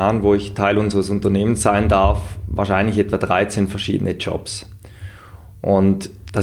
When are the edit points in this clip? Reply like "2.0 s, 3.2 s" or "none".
none